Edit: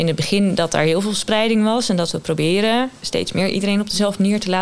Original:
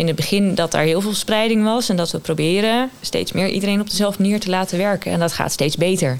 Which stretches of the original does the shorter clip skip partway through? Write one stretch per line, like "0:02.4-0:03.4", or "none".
none

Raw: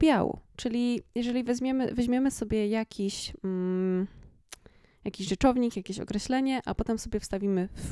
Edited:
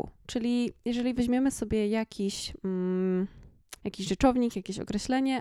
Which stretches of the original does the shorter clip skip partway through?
0:01.5-0:02.0
0:04.6-0:05.0

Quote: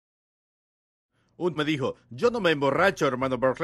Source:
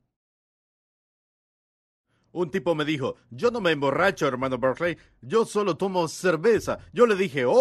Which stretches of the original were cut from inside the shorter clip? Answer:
0:02.5-0:02.8

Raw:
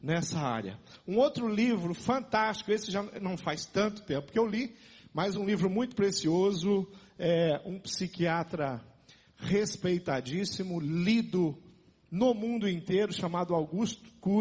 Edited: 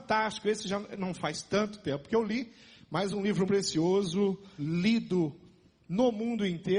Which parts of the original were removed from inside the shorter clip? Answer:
0:05.7-0:06.0
0:07.1-0:10.8

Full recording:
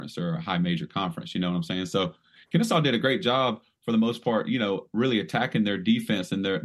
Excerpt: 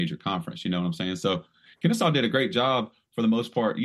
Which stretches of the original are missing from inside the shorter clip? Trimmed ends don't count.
none

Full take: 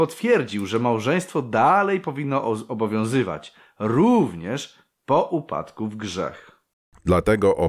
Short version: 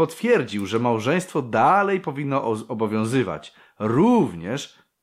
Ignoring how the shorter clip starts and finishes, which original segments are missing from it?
none

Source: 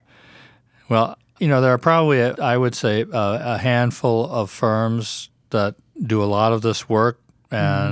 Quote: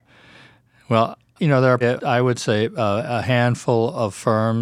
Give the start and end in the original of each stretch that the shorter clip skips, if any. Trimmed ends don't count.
0:01.8-0:02.2

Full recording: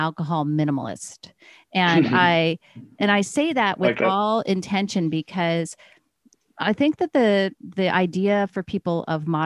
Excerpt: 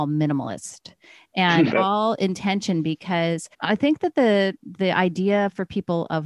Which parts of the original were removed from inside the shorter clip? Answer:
0:02.1-0:04.0
0:05.8-0:06.5

